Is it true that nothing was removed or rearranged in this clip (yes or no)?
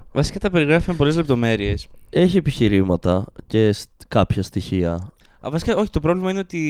yes